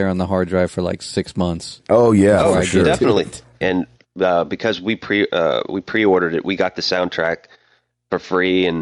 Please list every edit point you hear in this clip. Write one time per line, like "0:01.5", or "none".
0:03.6